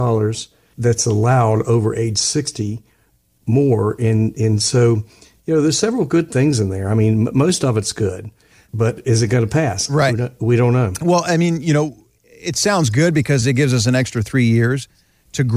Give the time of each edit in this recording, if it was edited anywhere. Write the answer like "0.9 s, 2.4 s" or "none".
none